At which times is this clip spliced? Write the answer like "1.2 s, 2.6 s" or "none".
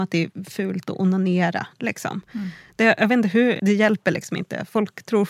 3.6 s